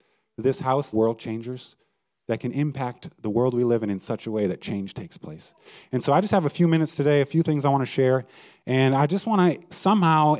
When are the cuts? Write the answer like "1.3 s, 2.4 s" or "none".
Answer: 0.9 s